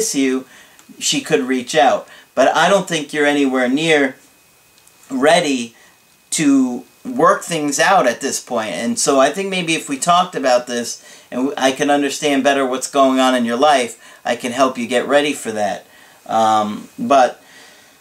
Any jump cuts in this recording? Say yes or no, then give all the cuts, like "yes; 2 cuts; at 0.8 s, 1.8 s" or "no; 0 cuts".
no; 0 cuts